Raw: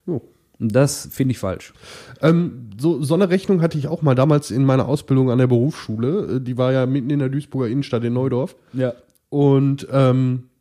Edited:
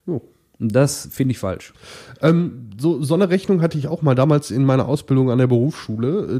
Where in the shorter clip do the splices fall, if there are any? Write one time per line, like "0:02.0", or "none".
none